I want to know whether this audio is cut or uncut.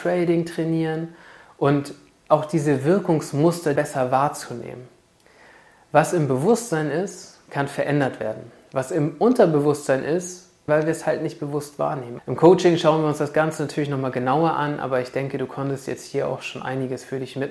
cut